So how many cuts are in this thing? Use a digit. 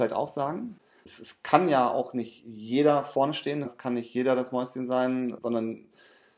2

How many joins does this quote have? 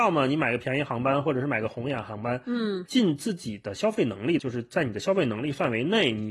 2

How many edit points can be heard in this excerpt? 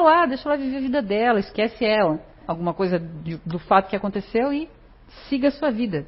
1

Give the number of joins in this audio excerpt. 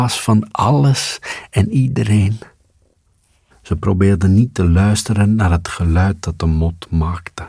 1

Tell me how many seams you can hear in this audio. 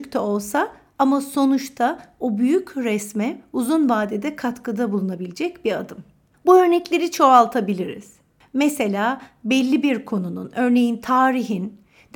1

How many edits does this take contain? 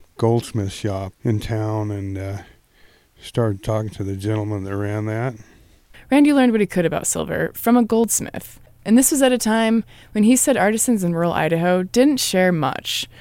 1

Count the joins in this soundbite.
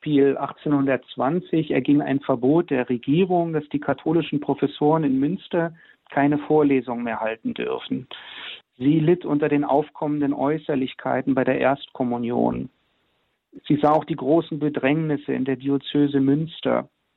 2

